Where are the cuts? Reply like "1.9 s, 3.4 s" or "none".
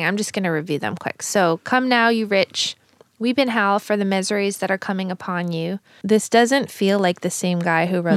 6.0 s